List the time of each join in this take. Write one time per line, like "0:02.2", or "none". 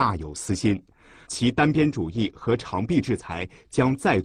0:01.3

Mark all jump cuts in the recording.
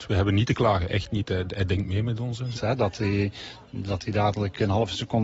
0:02.5

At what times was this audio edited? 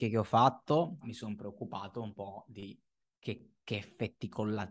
0:01.0

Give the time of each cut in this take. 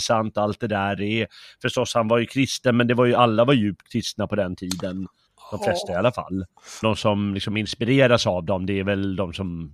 0:06.8

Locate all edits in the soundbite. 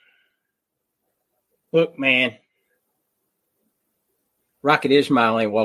none

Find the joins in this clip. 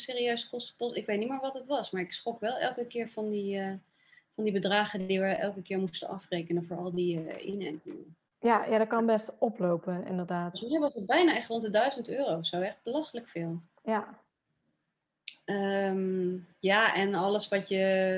none

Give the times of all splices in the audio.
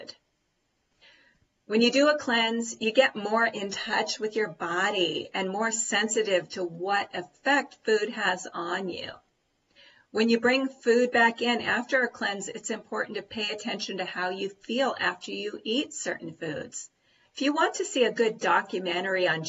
0:17.2

